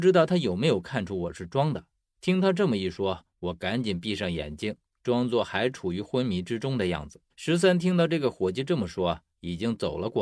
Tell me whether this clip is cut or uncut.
cut